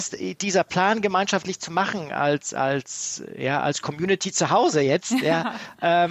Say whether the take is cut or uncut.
uncut